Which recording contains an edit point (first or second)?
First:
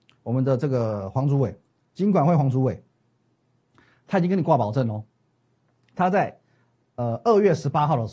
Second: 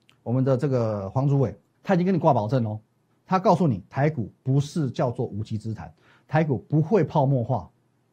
second